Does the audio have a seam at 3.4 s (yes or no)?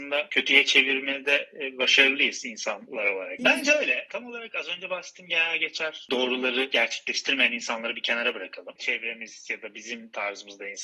yes